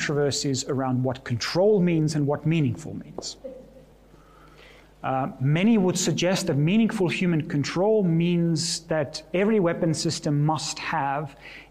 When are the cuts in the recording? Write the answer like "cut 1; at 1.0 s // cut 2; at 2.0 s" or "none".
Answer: none